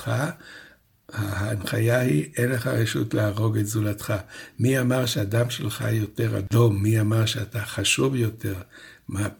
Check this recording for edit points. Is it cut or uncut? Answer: uncut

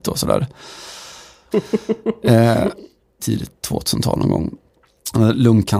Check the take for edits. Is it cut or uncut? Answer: cut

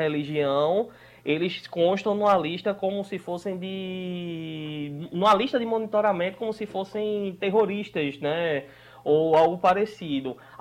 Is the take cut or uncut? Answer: uncut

